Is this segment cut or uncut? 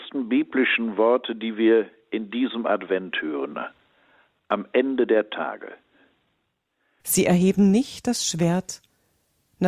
cut